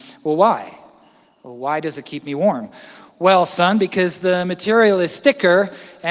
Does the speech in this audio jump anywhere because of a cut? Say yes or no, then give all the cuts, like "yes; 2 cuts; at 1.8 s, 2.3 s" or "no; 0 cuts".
no; 0 cuts